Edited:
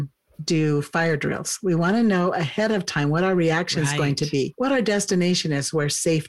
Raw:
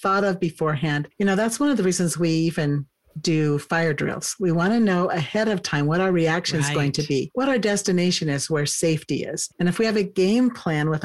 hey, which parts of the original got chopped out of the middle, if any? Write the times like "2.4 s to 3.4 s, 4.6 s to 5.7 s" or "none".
none